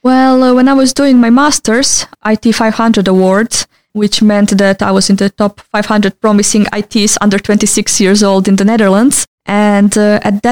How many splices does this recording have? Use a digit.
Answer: 2